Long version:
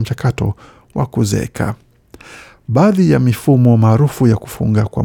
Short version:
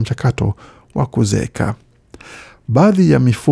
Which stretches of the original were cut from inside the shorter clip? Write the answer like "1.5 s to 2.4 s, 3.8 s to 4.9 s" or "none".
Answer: none